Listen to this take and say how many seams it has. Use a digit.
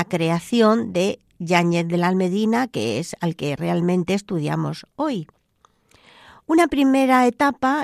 0